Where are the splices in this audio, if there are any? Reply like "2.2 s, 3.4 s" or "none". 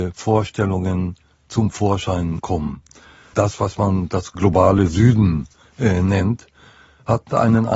none